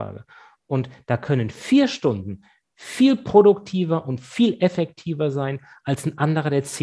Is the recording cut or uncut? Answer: uncut